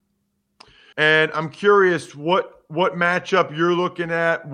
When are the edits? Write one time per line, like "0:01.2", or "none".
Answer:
0:00.9